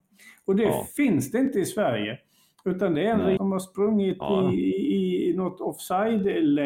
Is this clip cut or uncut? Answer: cut